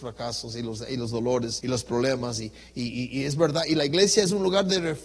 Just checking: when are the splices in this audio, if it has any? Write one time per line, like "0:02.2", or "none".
0:01.6

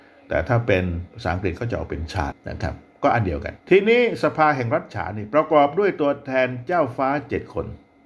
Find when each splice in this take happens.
0:02.3
0:03.6

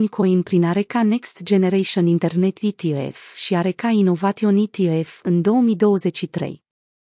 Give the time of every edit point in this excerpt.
none

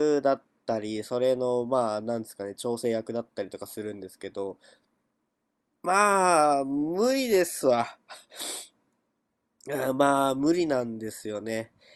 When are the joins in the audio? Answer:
none

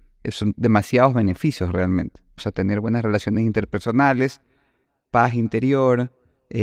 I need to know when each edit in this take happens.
0:02.4

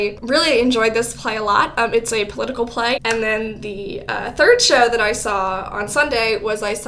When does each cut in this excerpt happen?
0:03.0

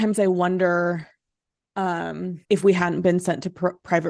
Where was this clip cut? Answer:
0:02.4

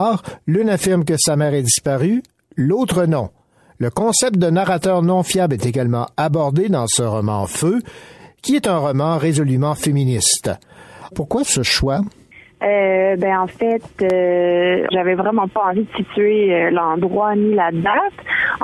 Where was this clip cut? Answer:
0:11.1
0:14.9

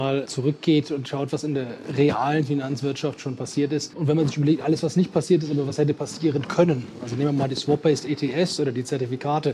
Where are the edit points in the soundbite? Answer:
none

